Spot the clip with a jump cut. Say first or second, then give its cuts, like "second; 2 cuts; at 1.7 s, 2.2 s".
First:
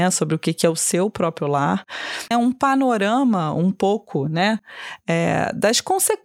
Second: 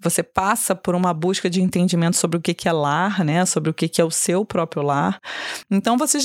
first; 1 cut; at 2.3 s